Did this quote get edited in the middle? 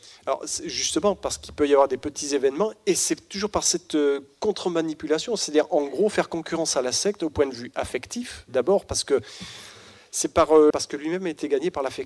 yes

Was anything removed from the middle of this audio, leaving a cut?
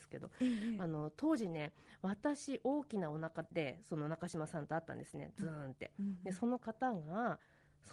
no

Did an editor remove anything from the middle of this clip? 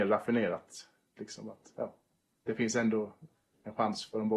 yes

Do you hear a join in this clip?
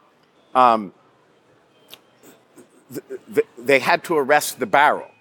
yes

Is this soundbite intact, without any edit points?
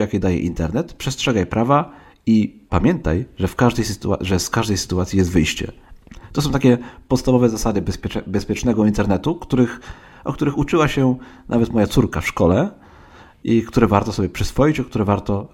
yes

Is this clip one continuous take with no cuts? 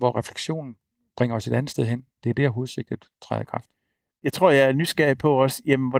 yes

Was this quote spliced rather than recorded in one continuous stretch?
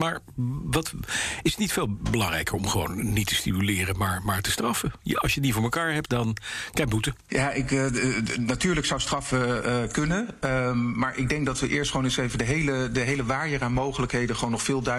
yes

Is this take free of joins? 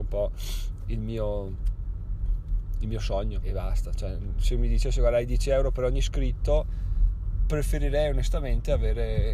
no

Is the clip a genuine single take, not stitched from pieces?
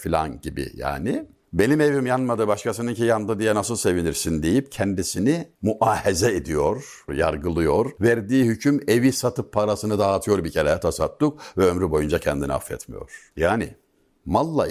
no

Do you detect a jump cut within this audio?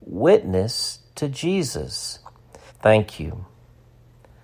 yes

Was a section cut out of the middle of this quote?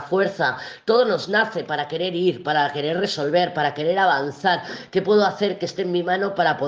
no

